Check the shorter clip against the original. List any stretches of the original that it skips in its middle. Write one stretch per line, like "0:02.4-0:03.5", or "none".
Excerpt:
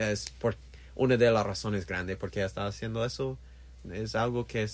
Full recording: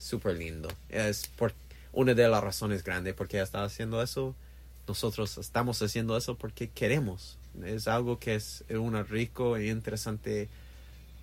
0:04.8-0:07.6